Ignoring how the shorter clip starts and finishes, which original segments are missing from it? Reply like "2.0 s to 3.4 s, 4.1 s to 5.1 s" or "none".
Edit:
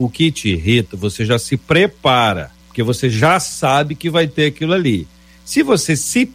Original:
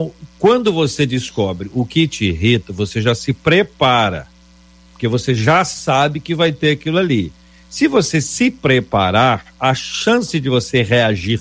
4.4 s to 4.8 s